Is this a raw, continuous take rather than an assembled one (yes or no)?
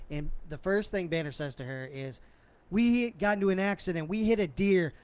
yes